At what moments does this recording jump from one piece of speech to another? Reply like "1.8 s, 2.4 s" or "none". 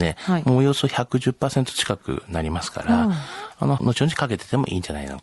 3.8 s